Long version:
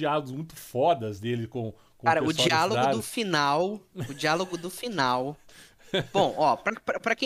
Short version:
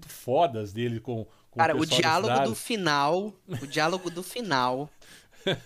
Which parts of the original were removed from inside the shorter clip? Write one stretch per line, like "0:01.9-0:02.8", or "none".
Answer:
none